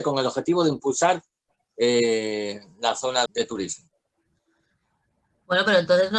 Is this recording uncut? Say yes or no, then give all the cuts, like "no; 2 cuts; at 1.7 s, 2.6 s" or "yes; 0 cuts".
no; 1 cut; at 3.3 s